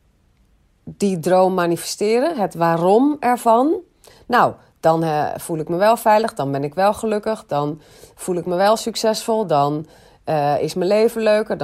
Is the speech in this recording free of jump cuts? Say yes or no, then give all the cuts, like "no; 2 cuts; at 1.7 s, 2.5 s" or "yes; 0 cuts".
yes; 0 cuts